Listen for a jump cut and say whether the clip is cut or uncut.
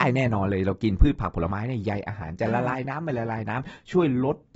uncut